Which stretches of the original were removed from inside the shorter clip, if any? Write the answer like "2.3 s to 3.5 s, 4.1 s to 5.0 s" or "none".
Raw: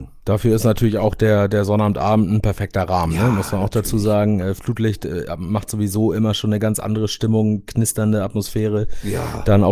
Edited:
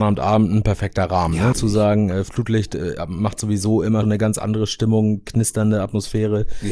3.3 s to 3.8 s, 6.3 s to 6.4 s